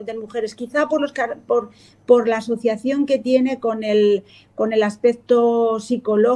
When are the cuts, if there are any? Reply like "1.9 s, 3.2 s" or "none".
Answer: none